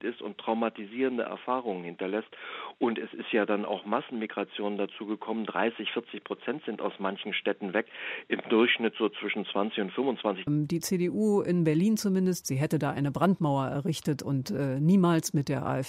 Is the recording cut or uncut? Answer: cut